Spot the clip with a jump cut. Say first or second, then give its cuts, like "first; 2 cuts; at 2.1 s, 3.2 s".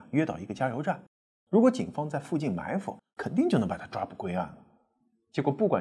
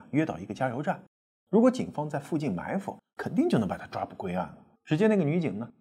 second; 1 cut; at 4.8 s